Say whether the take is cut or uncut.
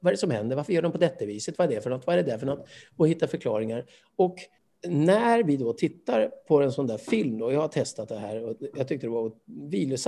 uncut